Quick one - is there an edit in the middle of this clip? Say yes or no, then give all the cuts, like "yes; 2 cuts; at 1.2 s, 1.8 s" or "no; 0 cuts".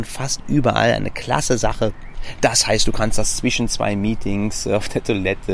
no; 0 cuts